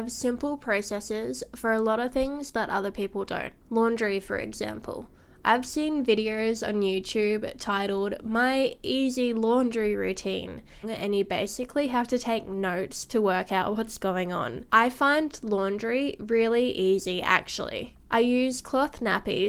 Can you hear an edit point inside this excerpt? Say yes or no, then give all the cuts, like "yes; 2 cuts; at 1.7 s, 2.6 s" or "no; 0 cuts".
yes; 2 cuts; at 10.8 s, 18.0 s